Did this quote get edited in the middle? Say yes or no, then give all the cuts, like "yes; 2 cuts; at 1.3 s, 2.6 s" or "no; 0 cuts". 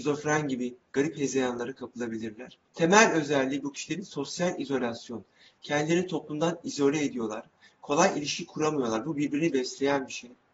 yes; 1 cut; at 2.7 s